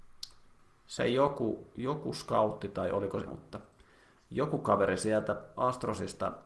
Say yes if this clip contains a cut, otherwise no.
yes